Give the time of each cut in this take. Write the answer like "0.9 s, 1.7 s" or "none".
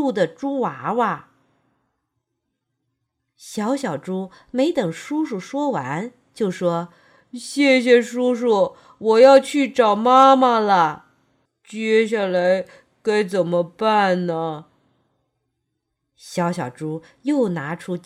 11.5 s